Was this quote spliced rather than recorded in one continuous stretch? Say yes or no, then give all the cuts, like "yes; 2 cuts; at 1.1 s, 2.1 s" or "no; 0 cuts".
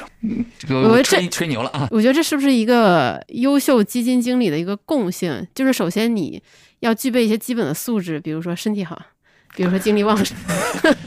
no; 0 cuts